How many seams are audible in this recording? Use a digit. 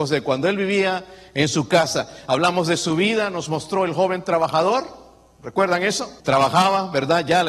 1